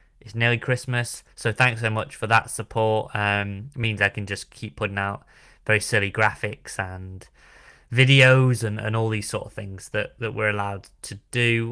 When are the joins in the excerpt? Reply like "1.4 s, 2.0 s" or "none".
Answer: 1.3 s